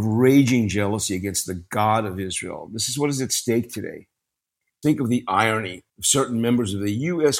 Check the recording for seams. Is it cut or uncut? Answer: cut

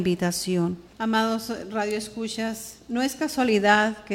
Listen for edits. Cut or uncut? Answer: cut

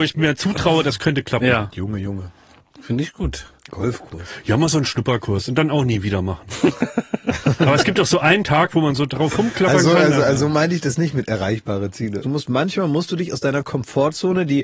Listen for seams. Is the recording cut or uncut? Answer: cut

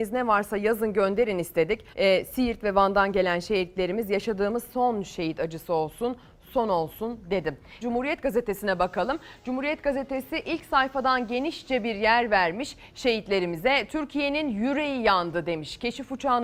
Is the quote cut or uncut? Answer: cut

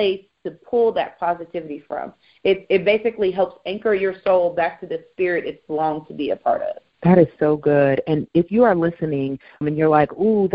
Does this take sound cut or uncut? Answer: cut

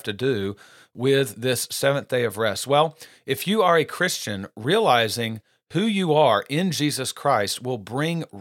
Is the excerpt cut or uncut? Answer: uncut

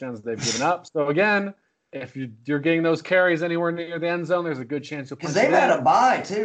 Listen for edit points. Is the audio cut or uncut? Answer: uncut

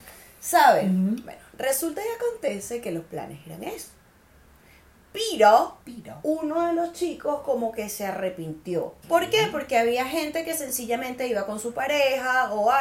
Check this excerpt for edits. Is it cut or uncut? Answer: cut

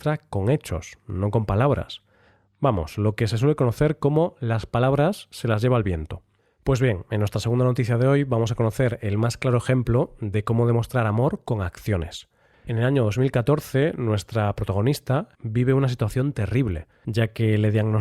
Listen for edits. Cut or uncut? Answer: cut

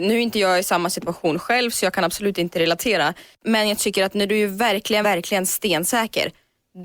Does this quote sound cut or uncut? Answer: cut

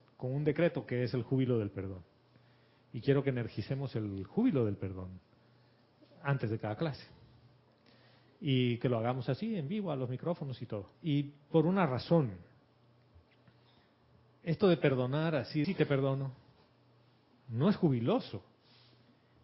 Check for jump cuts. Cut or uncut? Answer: cut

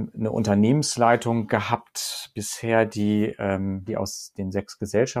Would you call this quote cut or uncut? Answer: cut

